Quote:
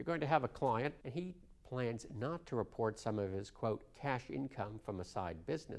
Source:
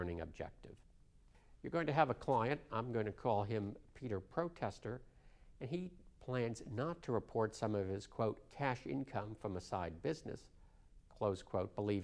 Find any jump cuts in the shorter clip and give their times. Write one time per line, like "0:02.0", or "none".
0:01.0